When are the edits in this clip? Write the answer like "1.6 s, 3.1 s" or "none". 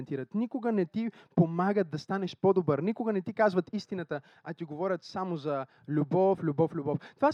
6.4 s